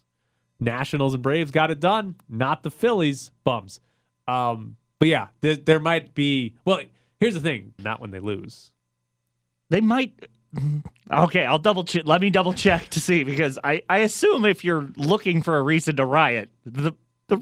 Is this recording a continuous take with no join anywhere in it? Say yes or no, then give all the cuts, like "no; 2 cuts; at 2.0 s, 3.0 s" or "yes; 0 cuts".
no; 1 cut; at 7.8 s